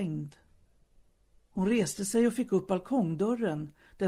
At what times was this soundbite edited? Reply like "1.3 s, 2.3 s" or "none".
none

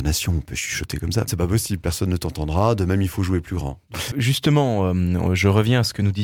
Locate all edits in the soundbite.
1.3 s, 4.1 s

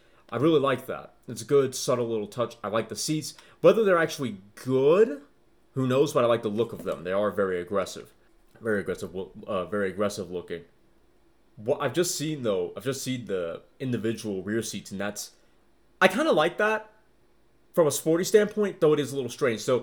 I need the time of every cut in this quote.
none

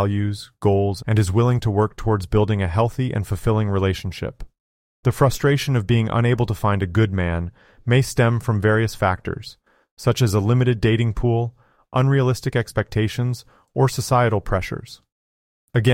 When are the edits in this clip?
1.0 s

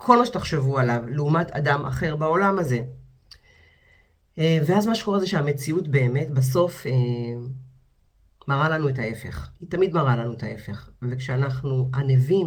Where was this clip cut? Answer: 9.6 s

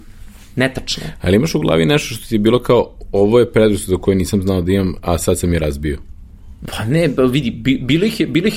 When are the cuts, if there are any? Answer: 6.6 s

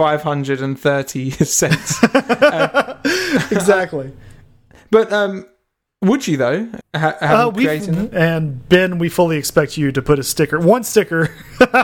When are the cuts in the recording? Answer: 6.8 s, 8.1 s

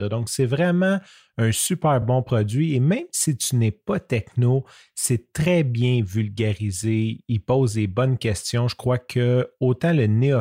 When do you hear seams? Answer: none

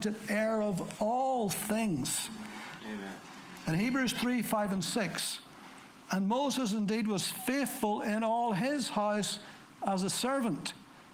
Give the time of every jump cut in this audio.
2.8 s

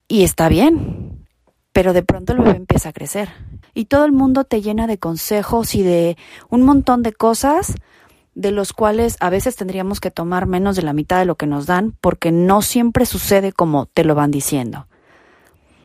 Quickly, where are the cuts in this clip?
1.6 s, 3.6 s

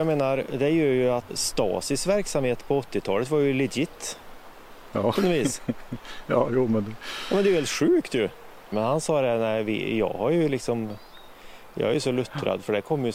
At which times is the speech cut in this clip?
1.3 s, 8.7 s

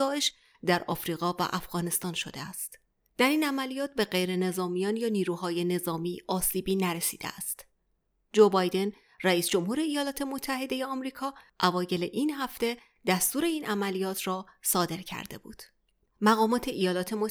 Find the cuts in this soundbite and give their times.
16.0 s

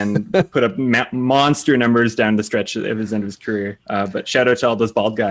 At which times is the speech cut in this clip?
none

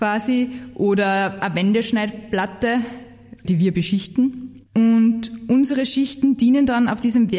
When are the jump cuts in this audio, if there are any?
3.4 s, 4.7 s

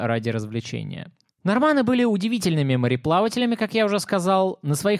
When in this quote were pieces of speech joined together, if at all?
1.3 s

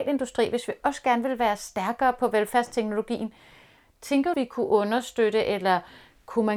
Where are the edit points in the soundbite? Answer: 4.3 s

